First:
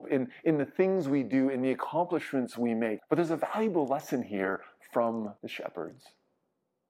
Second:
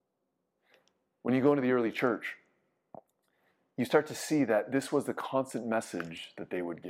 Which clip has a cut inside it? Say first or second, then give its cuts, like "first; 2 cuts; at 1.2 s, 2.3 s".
first; 2 cuts; at 3.0 s, 5.4 s